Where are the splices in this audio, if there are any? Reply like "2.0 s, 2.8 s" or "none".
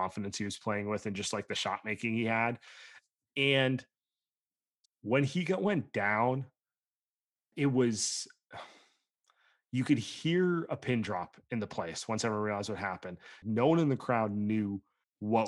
7.5 s, 13.4 s